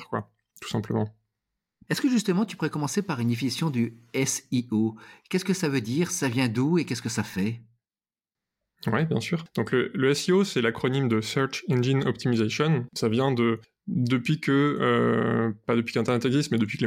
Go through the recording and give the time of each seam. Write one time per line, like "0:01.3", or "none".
0:12.9